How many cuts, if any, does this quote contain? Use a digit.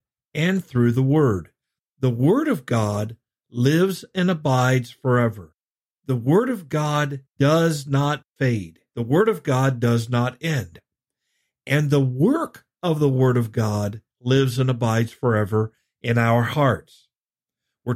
2